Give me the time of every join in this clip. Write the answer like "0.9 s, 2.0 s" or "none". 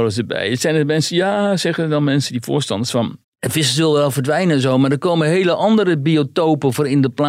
3.2 s